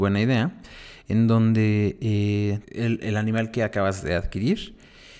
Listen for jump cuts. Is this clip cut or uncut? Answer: cut